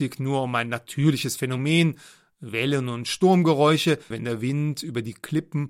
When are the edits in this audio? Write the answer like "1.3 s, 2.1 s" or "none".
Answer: 4.1 s